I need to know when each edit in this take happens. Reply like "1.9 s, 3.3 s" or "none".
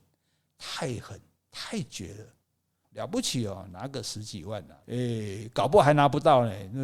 2.8 s, 4.8 s

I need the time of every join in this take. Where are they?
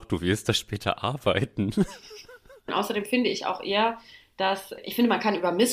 2.7 s

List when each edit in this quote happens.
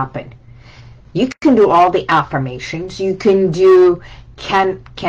none

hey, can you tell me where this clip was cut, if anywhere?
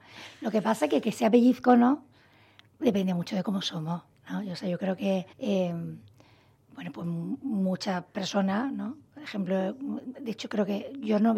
5.3 s

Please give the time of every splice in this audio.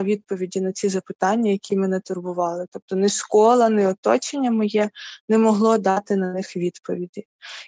none

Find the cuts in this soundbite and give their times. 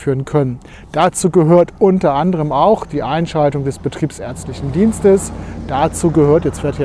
none

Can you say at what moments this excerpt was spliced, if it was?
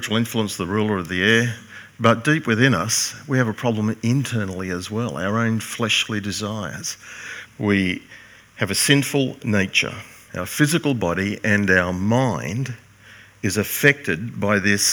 7.5 s

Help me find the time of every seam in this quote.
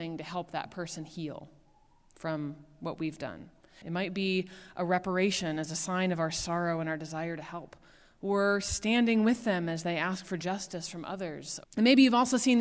3.8 s, 11.6 s

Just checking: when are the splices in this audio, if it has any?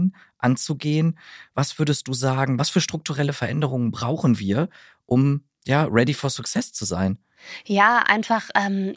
none

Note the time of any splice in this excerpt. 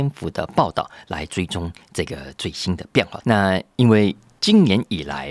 3.2 s

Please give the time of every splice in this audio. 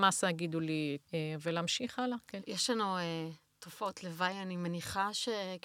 1.0 s, 2.4 s

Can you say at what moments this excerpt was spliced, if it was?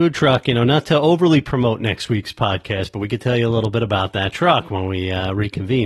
none

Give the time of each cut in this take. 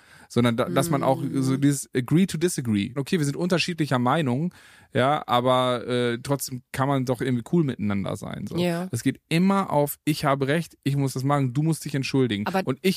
3.0 s

